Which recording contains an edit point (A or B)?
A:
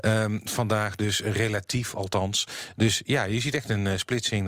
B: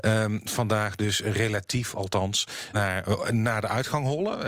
B